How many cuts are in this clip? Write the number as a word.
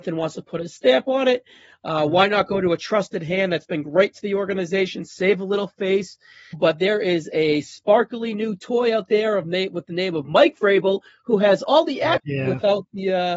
two